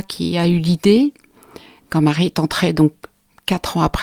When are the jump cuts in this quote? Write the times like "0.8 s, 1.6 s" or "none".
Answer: none

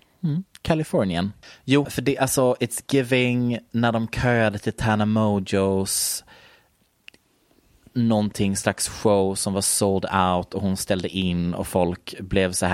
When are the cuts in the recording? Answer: 1.8 s

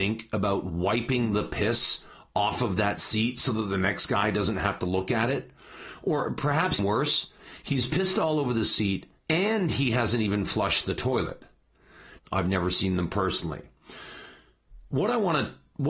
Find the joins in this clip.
6.8 s, 9.2 s, 12.2 s

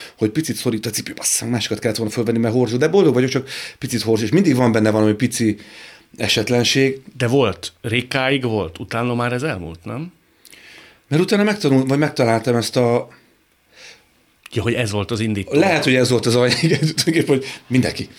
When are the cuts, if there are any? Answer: 14.4 s

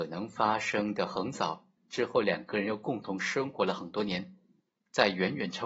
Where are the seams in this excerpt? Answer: 1.8 s

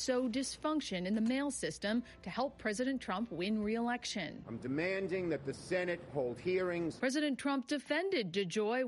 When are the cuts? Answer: none

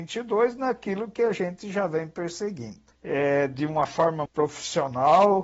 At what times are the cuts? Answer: 2.9 s, 4.3 s

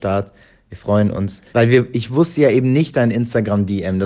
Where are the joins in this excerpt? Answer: 1.5 s

